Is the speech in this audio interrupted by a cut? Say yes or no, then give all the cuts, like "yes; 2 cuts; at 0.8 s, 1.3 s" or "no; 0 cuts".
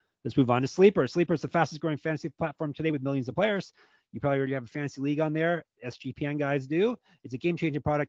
no; 0 cuts